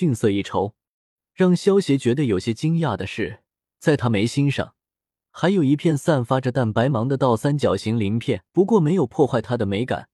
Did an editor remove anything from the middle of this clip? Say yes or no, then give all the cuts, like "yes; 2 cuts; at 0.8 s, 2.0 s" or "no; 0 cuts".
yes; 2 cuts; at 6.5 s, 8.5 s